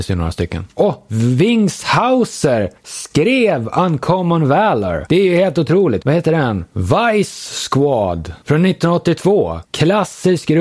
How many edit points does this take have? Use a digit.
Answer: 1